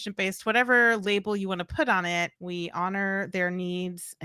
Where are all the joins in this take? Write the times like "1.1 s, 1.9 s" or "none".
2.4 s

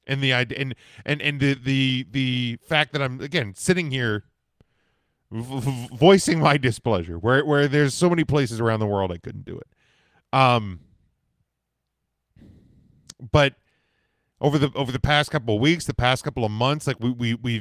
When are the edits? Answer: none

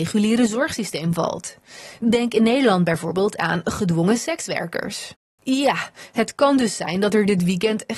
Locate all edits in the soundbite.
5.4 s

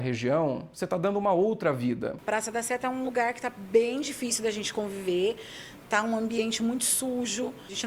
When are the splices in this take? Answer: none

